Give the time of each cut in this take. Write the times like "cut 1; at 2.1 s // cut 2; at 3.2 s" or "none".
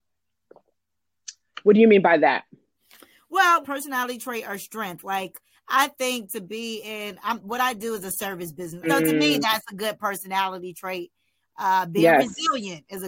cut 1; at 3.6 s // cut 2; at 8.8 s